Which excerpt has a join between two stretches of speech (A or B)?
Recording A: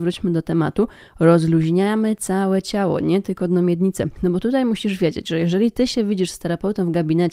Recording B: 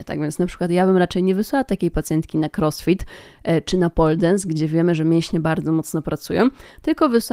A